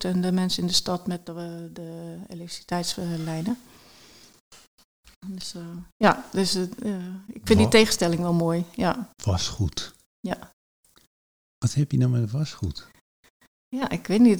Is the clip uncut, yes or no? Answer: yes